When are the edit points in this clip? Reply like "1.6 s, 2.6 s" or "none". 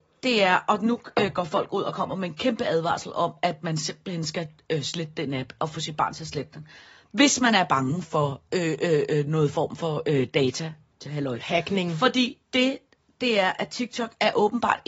none